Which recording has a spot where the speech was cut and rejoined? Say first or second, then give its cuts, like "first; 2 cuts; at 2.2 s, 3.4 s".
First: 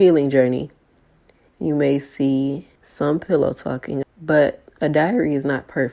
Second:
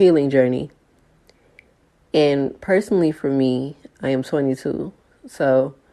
first; 3 cuts; at 1.5 s, 2.8 s, 4.0 s